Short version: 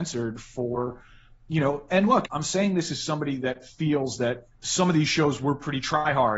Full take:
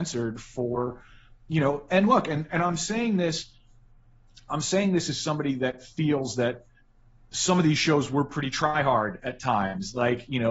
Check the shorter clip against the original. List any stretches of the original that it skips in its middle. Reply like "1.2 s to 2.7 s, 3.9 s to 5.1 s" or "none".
2.2 s to 4.4 s, 6.7 s to 7.2 s